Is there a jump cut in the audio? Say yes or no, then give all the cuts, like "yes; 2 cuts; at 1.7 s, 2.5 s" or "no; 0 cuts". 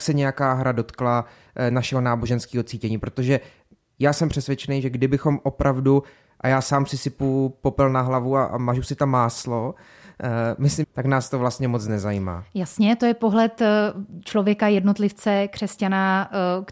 yes; 1 cut; at 10.8 s